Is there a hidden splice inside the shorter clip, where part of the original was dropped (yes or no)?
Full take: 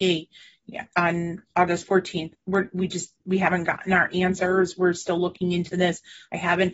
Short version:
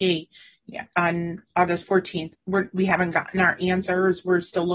yes